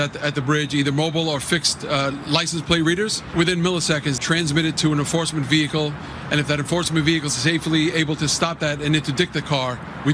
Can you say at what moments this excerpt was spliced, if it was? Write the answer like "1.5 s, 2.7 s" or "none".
4.2 s